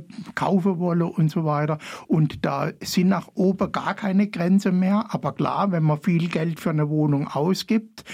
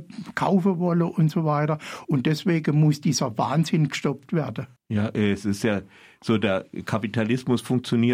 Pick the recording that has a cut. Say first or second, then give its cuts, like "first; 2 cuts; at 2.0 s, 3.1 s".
second; 2 cuts; at 2.1 s, 4.8 s